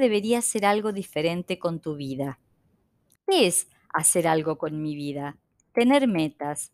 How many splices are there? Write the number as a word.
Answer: one